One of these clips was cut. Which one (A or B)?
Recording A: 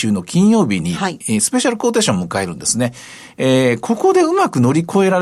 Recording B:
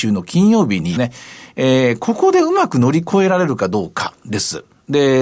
B